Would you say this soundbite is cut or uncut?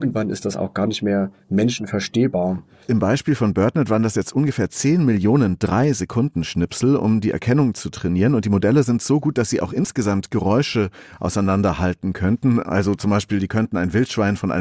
cut